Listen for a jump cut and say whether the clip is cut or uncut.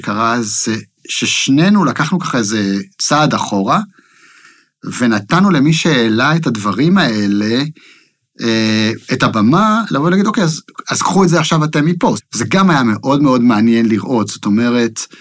cut